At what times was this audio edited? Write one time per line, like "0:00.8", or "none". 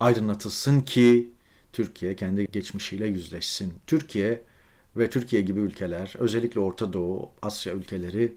0:02.5